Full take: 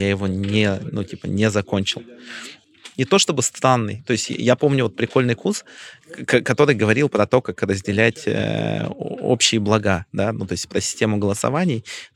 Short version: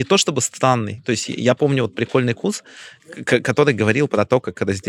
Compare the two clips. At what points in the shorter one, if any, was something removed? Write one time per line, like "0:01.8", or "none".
none